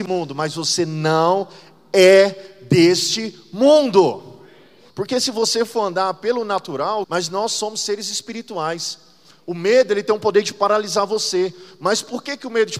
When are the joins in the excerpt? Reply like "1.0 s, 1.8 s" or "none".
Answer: 4.9 s, 7.0 s